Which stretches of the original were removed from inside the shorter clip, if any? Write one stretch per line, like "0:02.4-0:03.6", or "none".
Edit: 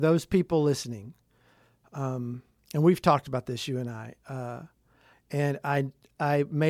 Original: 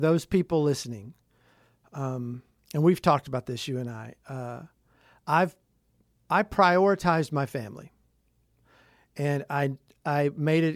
0:05.1-0:09.0